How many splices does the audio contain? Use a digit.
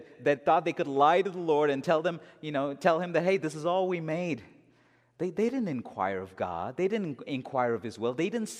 0